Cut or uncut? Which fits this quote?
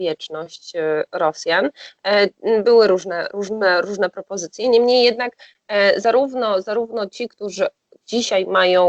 uncut